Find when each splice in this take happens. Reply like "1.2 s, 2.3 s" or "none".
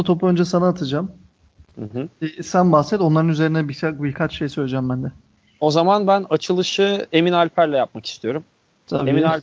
none